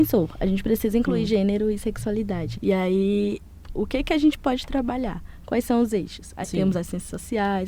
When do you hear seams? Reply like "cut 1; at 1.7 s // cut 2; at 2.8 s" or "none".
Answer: cut 1; at 2.5 s // cut 2; at 3.7 s // cut 3; at 6.4 s